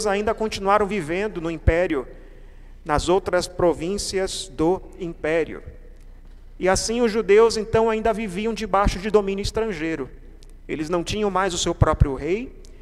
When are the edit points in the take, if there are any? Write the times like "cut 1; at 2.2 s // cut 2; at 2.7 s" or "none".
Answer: none